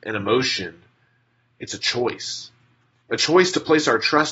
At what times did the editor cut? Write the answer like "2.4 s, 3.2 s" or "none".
none